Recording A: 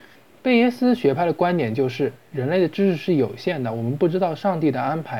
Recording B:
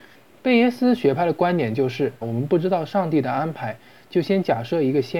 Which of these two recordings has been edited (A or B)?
B